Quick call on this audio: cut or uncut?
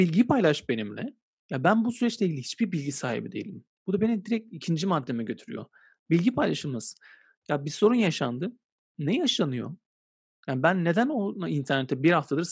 cut